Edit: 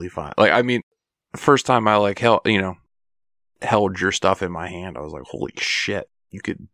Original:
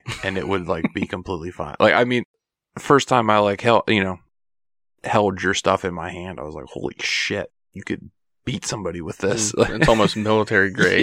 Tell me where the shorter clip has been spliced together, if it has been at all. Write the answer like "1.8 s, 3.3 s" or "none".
none